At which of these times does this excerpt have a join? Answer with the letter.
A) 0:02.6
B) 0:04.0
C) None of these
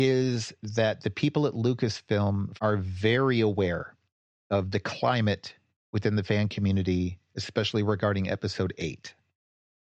A